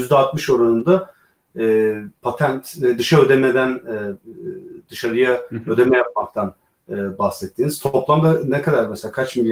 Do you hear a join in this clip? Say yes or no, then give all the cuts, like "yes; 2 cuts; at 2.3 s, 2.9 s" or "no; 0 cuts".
no; 0 cuts